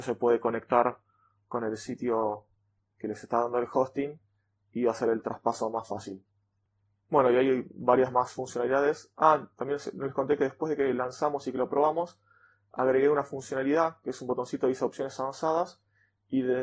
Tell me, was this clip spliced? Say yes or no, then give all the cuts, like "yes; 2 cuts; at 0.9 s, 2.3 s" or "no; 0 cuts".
no; 0 cuts